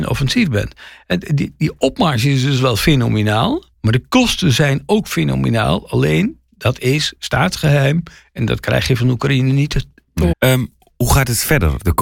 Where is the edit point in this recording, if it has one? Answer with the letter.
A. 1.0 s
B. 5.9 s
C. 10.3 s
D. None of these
C